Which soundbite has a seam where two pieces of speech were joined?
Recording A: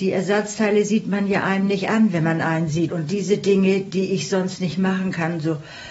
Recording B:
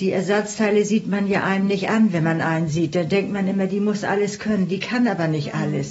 A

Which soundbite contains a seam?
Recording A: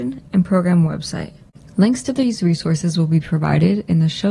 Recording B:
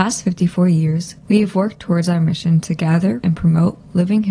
B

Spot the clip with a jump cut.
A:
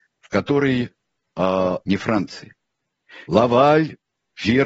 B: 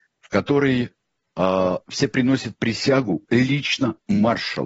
A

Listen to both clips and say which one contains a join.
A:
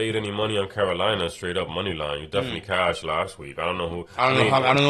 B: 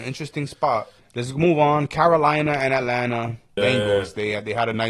B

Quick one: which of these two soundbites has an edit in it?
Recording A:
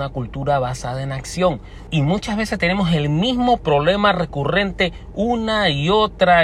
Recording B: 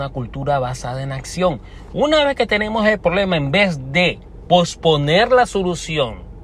A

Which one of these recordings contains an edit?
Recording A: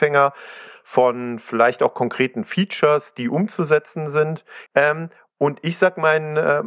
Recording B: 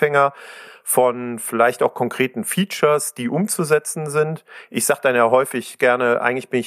A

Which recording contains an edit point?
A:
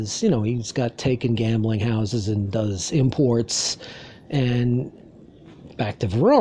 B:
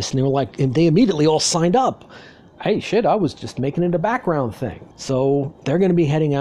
B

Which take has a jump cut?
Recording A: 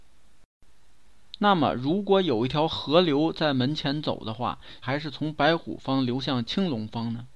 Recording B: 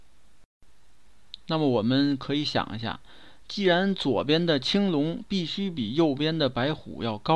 A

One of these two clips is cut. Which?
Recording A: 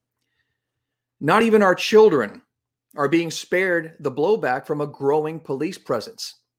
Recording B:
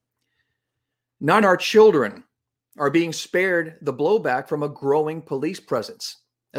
B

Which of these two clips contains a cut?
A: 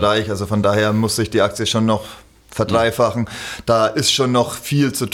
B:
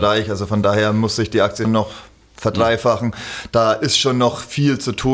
B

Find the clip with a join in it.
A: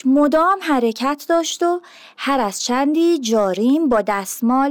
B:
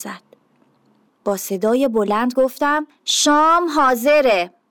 B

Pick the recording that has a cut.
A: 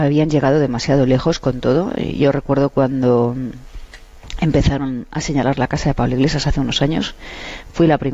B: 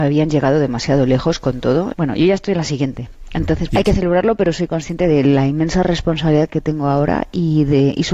B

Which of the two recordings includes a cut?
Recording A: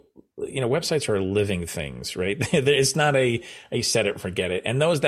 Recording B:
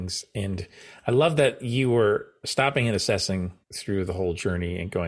B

